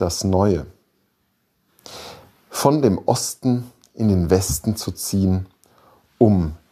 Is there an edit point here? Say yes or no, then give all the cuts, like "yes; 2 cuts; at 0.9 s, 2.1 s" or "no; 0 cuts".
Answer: no; 0 cuts